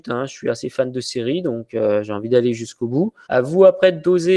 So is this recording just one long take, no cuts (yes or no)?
no